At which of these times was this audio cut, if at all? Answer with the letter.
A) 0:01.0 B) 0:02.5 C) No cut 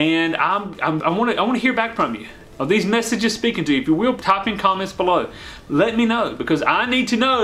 A